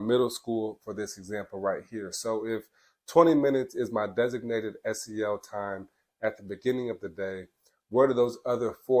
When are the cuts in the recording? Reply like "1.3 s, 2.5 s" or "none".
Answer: none

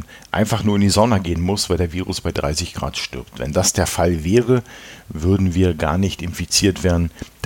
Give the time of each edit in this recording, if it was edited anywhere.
none

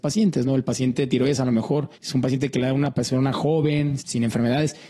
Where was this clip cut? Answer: 1.9 s, 4.0 s

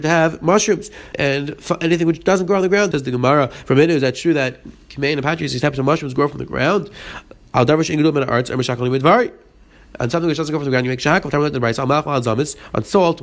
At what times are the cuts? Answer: 1.1 s, 2.9 s

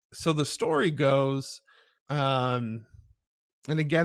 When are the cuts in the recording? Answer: 2.0 s

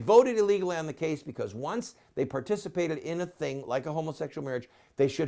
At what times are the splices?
none

